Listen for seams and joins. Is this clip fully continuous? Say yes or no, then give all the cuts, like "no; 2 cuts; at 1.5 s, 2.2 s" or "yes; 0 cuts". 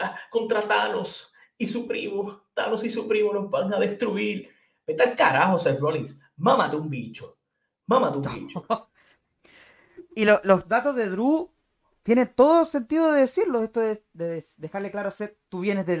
yes; 0 cuts